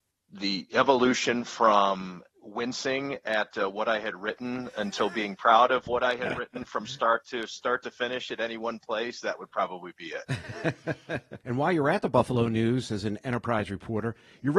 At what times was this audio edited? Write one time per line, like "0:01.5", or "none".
0:11.4

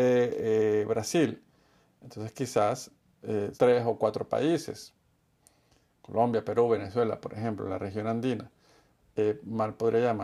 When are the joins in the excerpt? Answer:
0:03.6

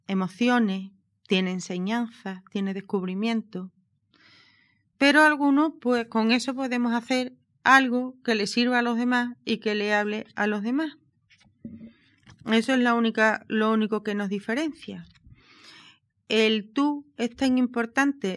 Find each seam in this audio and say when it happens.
0:01.1

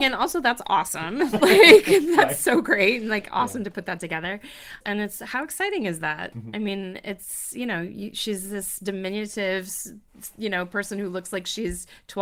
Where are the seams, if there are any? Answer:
0:04.8

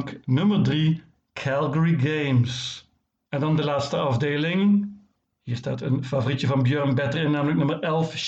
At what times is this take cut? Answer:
0:03.2

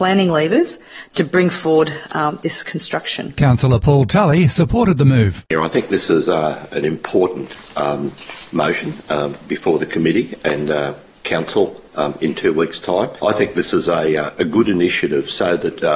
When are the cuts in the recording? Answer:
0:13.2

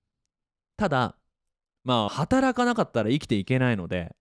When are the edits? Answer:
0:02.1

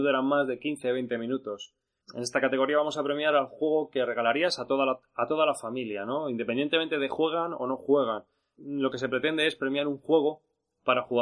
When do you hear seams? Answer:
none

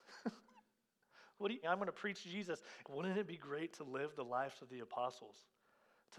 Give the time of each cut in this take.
0:01.6
0:02.8

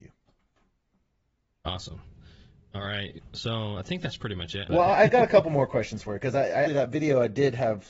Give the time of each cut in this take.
0:04.7
0:06.7

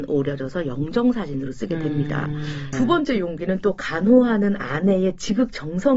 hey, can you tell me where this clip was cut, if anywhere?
0:02.7

